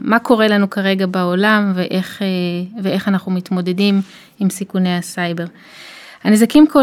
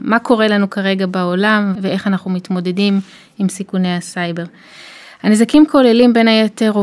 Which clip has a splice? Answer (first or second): second